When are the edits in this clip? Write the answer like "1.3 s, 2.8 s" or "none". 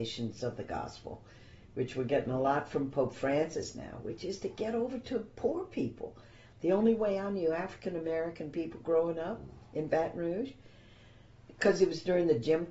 6.5 s